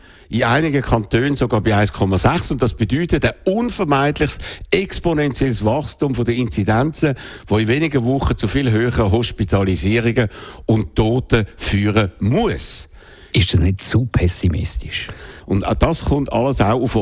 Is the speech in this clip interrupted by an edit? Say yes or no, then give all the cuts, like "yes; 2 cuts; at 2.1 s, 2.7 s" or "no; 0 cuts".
yes; 2 cuts; at 13.3 s, 15.4 s